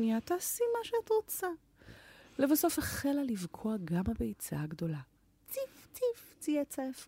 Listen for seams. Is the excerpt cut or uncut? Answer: uncut